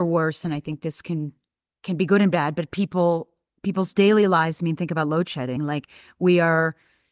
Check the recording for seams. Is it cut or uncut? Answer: uncut